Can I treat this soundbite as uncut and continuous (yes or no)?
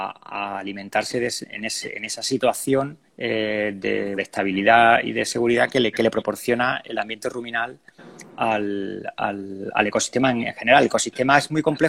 no